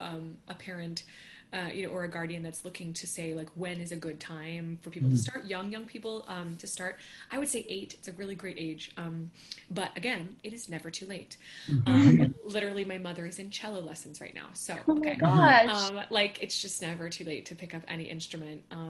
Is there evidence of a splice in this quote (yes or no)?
yes